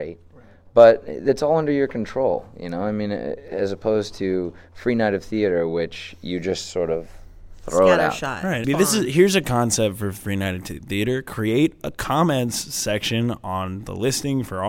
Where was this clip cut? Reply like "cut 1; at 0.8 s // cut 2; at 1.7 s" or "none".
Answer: cut 1; at 8.6 s